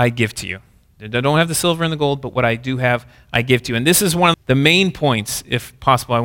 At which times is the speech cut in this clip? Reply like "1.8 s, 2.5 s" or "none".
4.3 s